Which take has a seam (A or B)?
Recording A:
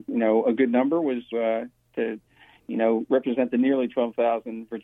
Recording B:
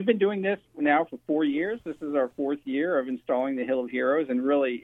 A